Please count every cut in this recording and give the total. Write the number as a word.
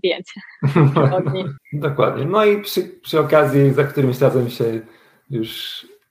one